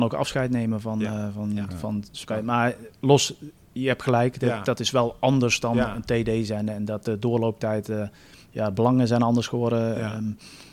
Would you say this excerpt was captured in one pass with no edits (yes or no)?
yes